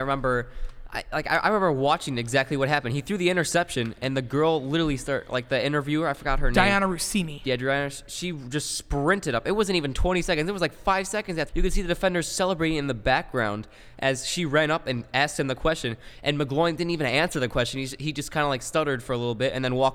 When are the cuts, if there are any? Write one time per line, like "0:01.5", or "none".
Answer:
0:11.5